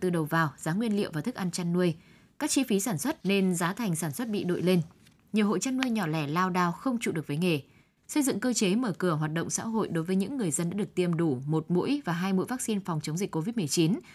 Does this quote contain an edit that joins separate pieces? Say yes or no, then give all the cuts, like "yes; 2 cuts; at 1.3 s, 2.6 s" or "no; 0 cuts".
yes; 2 cuts; at 3.2 s, 8.0 s